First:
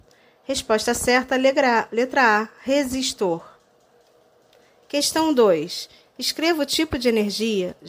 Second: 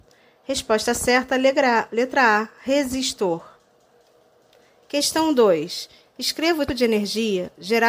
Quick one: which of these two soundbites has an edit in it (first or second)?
second